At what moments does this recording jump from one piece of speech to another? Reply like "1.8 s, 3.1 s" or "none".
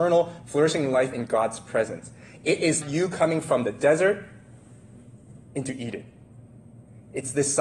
2.8 s